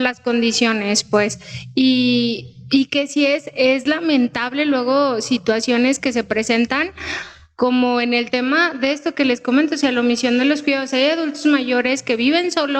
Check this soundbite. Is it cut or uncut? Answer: uncut